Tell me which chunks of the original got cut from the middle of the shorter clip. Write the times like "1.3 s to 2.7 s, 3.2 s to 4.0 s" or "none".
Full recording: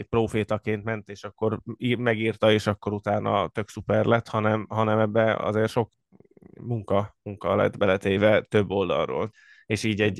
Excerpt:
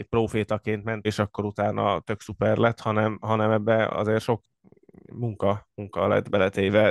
1.0 s to 2.5 s